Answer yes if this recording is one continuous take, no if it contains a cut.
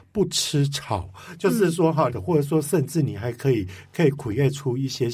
no